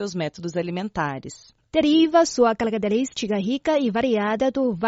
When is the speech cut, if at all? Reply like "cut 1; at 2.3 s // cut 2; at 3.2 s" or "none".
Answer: cut 1; at 1.7 s

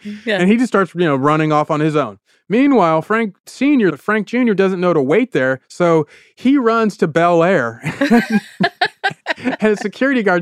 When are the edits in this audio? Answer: cut 1; at 3.9 s

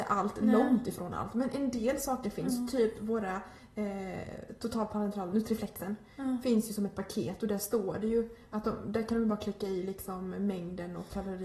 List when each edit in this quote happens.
cut 1; at 5.3 s

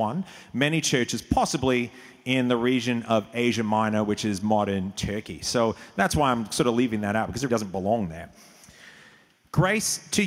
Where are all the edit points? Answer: cut 1; at 7.5 s

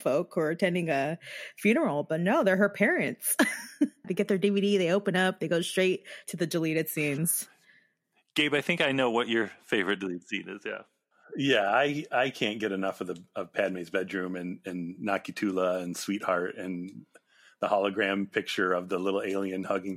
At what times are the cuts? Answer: cut 1; at 4.0 s

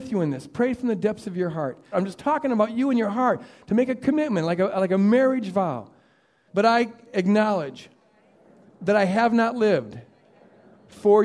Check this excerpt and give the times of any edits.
cut 1; at 1.9 s // cut 2; at 6.5 s

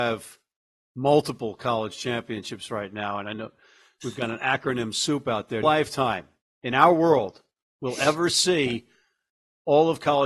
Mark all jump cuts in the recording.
cut 1; at 5.6 s

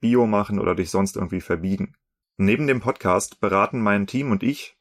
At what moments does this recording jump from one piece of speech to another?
cut 1; at 2.2 s

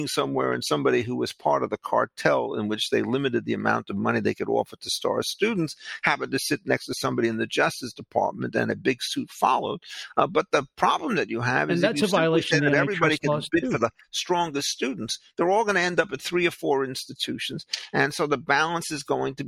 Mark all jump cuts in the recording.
none

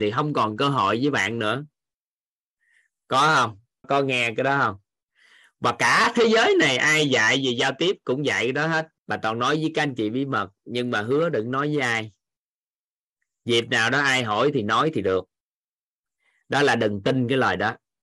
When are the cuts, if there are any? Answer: cut 1; at 3.8 s // cut 2; at 9.0 s

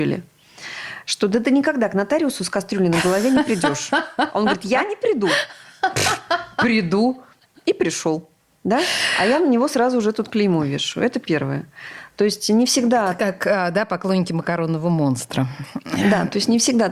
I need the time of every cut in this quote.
none

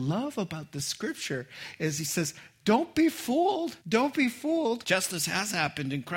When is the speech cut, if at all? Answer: cut 1; at 3.8 s // cut 2; at 4.8 s

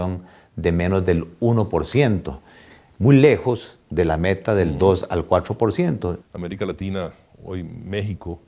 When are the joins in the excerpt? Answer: cut 1; at 6.2 s

